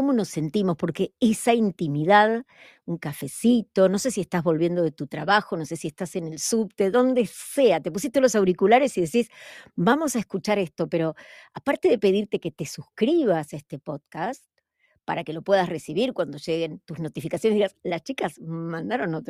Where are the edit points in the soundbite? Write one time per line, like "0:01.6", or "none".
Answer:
0:17.8